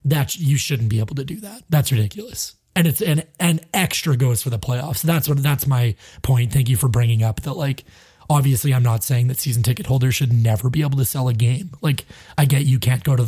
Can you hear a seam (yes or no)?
no